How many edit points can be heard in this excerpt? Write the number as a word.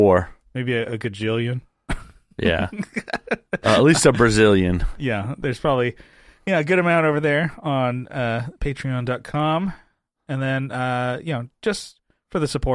zero